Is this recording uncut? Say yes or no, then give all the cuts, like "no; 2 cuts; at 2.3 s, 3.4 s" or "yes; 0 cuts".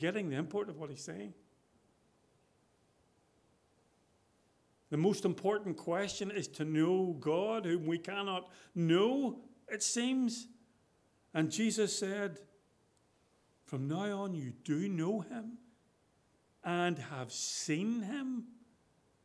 yes; 0 cuts